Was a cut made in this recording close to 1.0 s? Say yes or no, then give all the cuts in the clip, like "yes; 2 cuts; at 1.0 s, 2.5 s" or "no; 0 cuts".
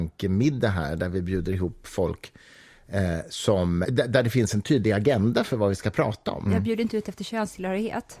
no; 2 cuts; at 3.8 s, 6.5 s